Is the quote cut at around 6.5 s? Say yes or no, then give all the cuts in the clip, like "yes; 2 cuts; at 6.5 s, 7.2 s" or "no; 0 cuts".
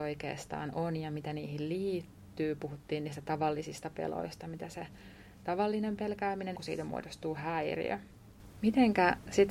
yes; 1 cut; at 6.5 s